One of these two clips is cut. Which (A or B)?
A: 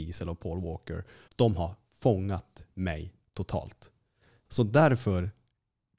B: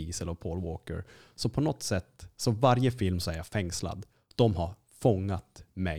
A